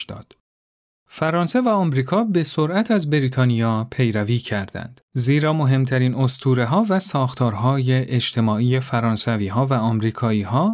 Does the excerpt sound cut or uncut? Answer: uncut